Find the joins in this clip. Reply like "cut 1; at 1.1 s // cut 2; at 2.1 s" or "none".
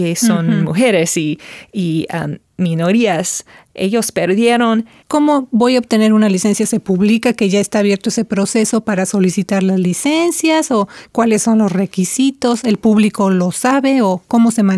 cut 1; at 5.0 s